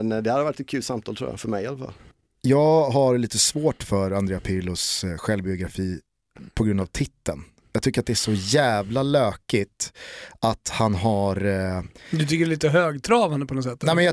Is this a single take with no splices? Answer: yes; 0 cuts

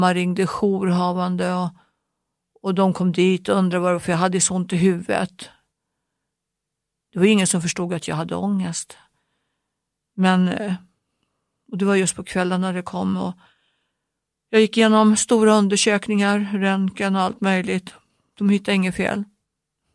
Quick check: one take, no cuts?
yes; 0 cuts

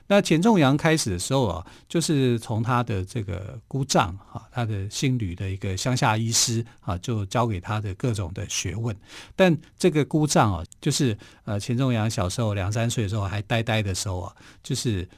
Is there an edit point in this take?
yes; 1 cut; at 10.7 s

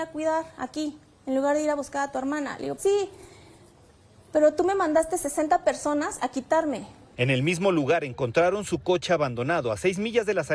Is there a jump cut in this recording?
yes; 2 cuts; at 2.8 s, 7.1 s

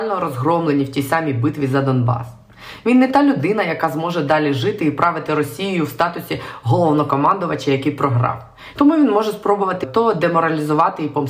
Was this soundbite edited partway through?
yes; 2 cuts; at 8.7 s, 9.8 s

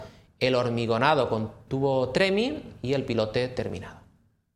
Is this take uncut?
no; 1 cut; at 1.7 s

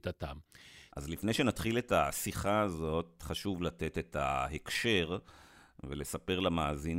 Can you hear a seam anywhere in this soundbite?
yes; 1 cut; at 0.9 s

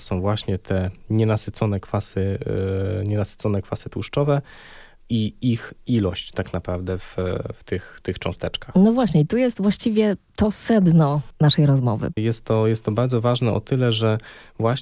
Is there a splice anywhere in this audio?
yes; 1 cut; at 12.2 s

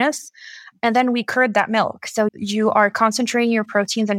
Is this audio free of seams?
no; 1 cut; at 2.3 s

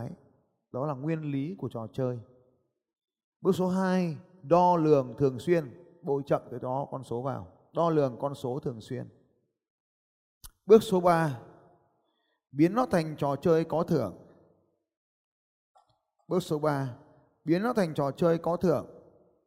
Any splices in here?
no; 0 cuts

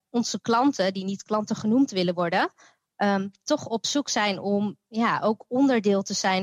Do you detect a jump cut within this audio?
no; 0 cuts

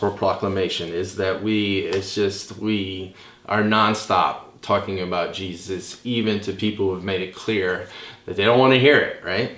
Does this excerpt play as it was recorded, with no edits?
yes; 0 cuts

